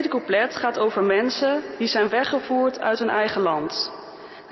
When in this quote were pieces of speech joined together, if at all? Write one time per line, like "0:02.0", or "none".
none

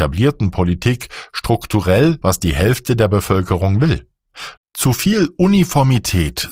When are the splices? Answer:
0:02.2
0:04.6

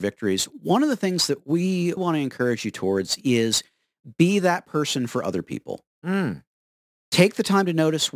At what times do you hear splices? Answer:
0:02.0
0:07.0

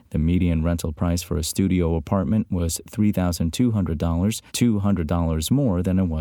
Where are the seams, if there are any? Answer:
0:04.5

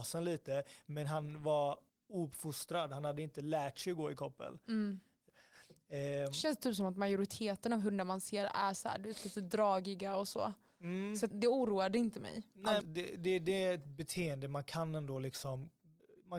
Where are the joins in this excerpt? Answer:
0:11.3
0:12.8

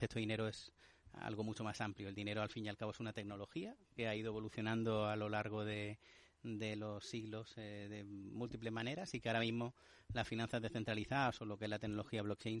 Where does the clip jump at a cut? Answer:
none

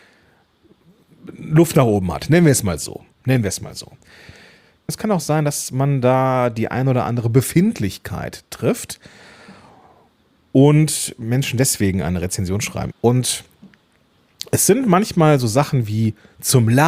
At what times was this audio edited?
0:04.9
0:12.9

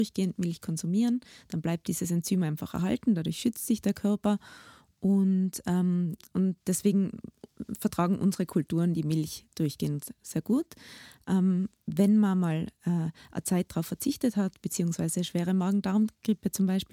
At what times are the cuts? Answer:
none

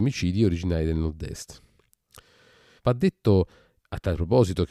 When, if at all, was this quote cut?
0:02.8

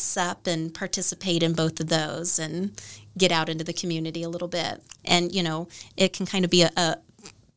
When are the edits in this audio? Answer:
0:05.0

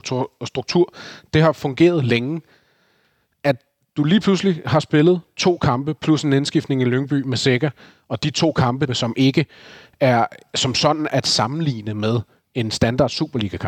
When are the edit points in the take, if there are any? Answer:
0:08.9
0:11.1

